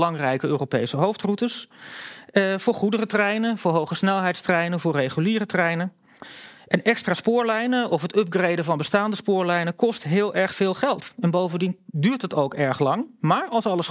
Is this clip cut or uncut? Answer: uncut